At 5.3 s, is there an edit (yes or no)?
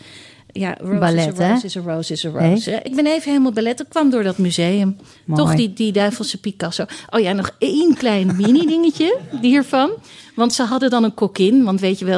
no